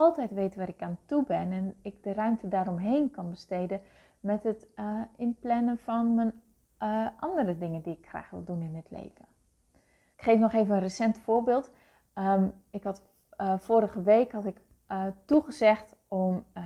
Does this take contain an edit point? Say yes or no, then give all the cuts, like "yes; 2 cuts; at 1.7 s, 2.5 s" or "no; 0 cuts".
yes; 1 cut; at 10.1 s